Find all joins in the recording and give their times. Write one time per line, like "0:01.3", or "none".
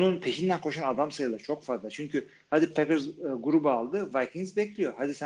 none